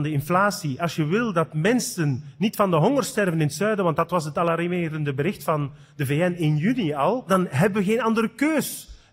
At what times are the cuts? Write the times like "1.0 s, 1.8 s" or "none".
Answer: none